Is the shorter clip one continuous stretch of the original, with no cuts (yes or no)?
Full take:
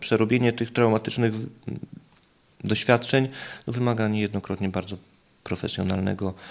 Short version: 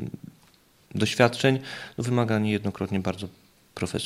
yes